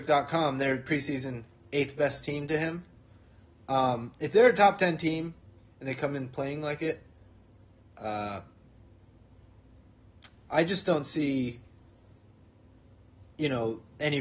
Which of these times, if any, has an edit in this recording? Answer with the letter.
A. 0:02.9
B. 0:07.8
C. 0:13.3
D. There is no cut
D